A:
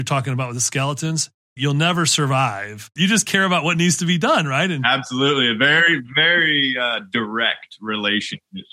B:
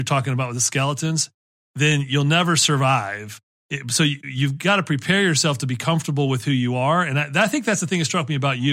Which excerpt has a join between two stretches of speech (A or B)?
A